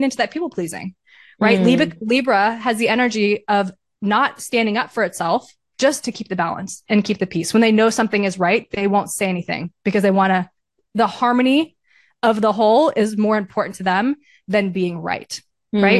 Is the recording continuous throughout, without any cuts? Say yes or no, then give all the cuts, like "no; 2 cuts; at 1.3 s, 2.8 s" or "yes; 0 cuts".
yes; 0 cuts